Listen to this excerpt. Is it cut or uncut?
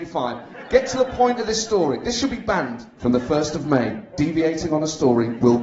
cut